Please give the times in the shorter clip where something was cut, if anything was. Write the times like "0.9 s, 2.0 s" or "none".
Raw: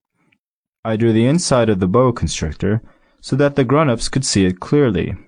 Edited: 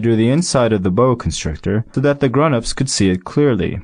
1.9 s